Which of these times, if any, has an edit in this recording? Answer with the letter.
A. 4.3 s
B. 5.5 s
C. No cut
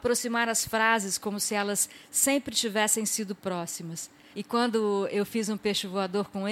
A